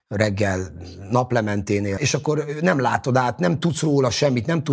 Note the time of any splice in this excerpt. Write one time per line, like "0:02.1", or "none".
0:02.0